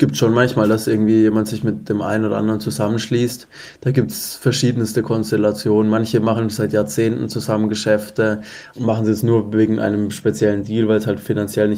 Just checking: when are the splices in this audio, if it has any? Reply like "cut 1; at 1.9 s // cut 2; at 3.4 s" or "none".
cut 1; at 8.7 s